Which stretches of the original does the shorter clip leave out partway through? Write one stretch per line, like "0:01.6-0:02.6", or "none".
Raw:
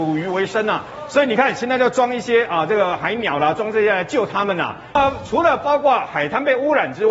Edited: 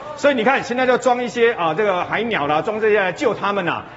none